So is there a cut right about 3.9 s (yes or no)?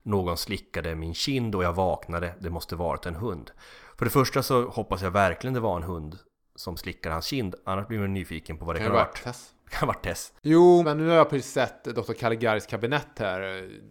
no